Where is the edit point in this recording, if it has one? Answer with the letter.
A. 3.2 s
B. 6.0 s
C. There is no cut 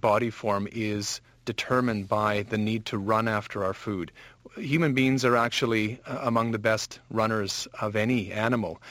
C